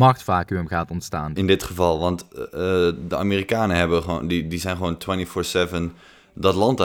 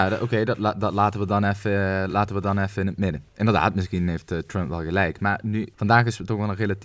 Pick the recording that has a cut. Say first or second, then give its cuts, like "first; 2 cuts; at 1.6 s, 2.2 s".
first; 1 cut; at 1.4 s